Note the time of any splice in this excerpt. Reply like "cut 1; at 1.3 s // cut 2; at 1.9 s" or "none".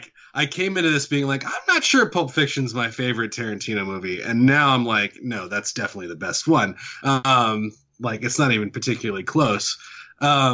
none